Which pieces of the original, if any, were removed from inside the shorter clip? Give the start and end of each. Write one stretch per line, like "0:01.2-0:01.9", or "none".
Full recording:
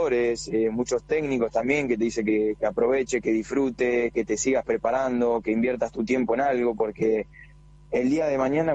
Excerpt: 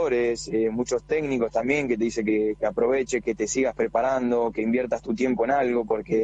0:03.2-0:04.1